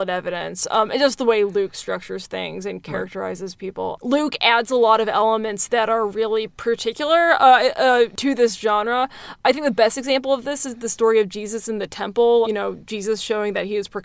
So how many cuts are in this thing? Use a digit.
2